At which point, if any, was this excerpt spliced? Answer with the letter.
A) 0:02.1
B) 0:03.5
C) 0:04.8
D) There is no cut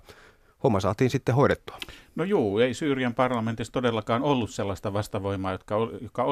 D